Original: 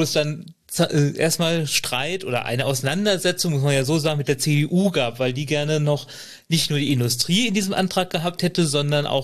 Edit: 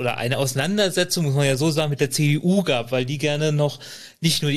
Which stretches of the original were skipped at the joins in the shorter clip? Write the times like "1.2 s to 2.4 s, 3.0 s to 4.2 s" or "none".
none